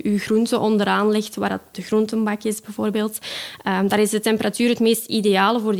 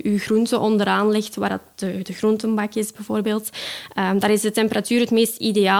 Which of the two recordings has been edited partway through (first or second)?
first